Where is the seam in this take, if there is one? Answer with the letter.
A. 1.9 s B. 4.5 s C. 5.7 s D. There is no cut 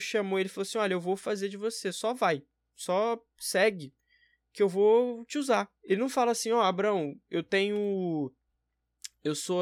C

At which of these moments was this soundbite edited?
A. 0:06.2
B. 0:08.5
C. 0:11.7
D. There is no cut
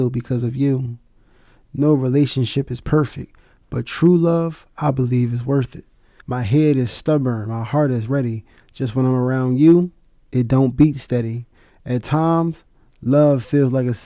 A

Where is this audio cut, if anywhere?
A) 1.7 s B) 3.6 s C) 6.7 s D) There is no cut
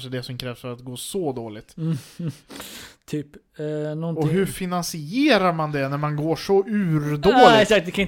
D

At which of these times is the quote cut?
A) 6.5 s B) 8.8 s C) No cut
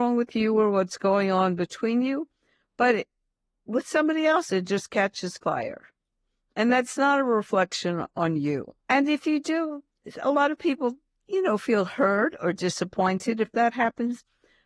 B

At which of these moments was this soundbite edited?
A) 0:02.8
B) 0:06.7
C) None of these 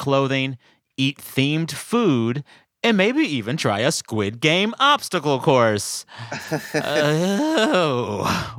C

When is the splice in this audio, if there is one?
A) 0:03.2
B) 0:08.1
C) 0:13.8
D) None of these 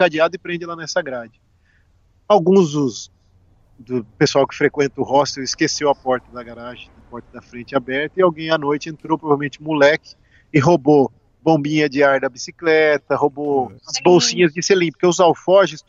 C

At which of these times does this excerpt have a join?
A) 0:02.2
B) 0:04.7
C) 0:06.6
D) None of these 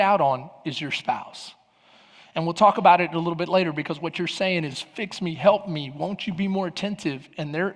D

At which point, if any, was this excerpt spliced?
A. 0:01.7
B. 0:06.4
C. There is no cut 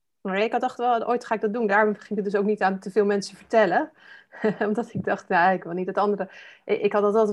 C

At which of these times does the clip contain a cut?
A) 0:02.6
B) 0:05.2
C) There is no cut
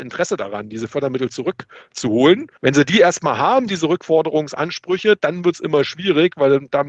A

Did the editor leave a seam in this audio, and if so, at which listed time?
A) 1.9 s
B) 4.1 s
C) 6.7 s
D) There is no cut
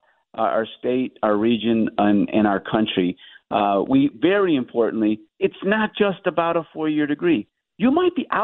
B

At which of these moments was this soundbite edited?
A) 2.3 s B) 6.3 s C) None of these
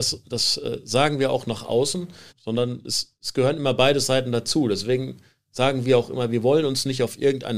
A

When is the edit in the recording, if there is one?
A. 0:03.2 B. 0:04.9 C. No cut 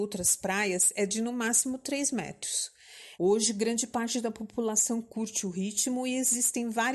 A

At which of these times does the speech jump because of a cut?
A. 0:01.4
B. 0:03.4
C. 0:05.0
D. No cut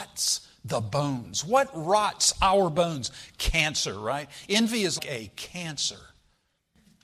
C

